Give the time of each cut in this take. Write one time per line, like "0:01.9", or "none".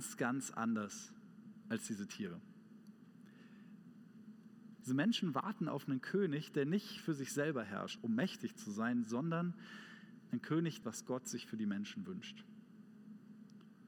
0:04.8
0:08.0
0:10.8